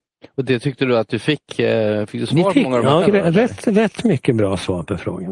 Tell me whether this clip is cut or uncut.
cut